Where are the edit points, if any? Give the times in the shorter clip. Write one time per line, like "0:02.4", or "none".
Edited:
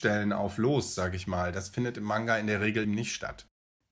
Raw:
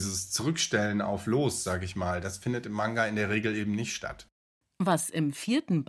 0:02.8